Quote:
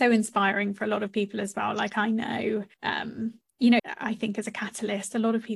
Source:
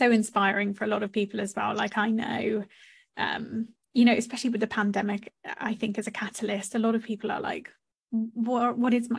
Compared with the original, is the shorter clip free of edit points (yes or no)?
no